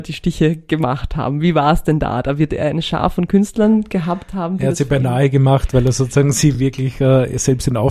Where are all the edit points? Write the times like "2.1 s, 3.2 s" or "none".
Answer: none